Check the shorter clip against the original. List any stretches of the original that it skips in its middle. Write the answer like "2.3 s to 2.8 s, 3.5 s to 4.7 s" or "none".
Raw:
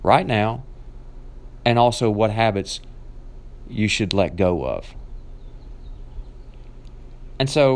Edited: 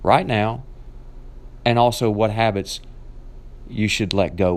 none